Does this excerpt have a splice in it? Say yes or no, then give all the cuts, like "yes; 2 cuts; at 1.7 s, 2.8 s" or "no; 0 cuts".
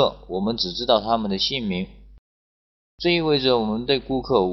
no; 0 cuts